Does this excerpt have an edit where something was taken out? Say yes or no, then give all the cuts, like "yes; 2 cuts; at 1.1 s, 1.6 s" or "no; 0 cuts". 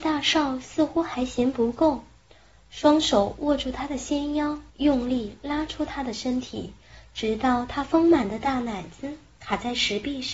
yes; 1 cut; at 4.7 s